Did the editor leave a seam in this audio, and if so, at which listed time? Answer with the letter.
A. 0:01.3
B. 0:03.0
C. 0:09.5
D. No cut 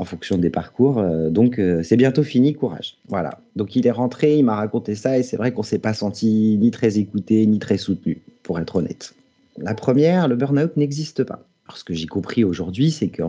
C